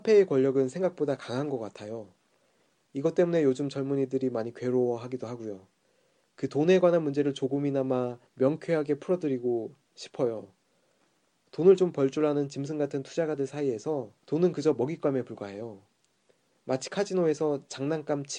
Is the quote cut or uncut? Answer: cut